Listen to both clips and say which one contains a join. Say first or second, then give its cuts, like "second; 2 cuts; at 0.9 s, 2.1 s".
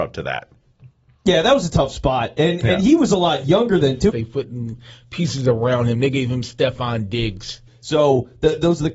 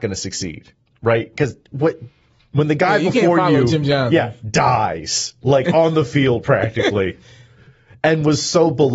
first; 2 cuts; at 4.1 s, 7.7 s